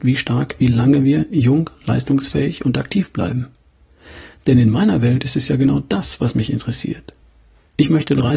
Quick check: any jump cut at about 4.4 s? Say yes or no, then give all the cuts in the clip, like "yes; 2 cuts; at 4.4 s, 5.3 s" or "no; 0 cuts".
no; 0 cuts